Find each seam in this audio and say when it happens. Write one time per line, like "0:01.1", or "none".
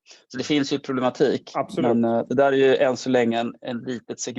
none